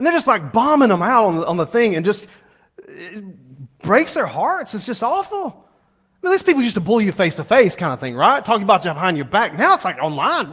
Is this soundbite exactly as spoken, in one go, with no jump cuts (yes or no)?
yes